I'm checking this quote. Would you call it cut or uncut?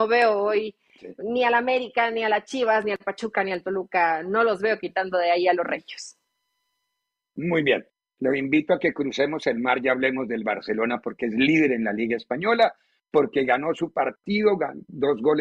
uncut